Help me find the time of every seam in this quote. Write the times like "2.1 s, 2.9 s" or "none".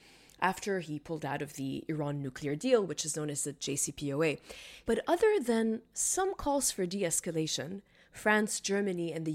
4.8 s